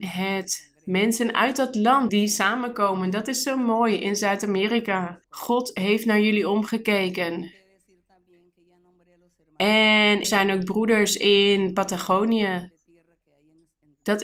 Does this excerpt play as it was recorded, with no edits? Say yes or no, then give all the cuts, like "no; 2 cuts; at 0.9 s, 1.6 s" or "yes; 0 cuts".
no; 3 cuts; at 2.1 s, 5.2 s, 10.2 s